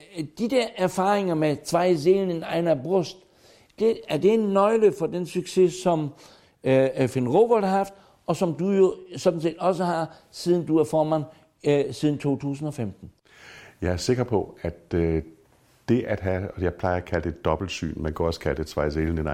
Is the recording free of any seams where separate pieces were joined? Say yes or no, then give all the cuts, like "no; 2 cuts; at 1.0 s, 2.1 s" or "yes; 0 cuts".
no; 1 cut; at 3.8 s